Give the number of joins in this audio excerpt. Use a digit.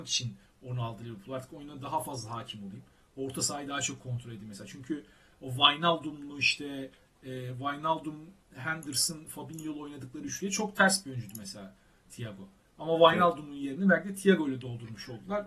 0